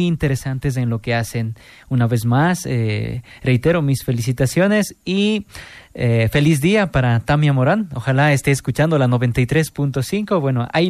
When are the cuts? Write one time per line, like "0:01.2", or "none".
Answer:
none